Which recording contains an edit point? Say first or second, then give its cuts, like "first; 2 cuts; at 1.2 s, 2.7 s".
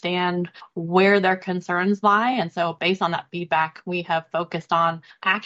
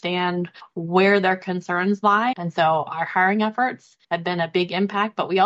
second; 2 cuts; at 2.3 s, 4.0 s